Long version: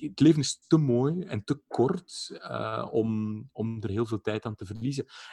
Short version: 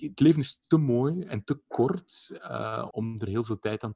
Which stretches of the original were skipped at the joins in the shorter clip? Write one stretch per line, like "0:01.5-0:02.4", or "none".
0:02.9-0:03.5